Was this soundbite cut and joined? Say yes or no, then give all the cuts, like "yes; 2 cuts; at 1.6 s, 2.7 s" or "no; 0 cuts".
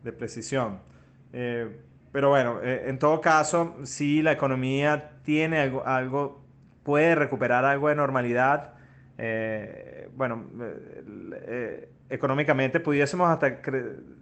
no; 0 cuts